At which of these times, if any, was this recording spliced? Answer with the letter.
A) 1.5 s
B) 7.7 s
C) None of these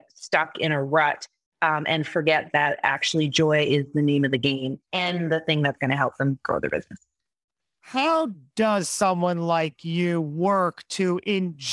C